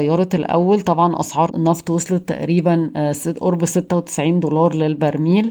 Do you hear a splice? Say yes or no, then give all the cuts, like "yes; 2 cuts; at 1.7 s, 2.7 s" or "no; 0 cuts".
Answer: yes; 1 cut; at 1.5 s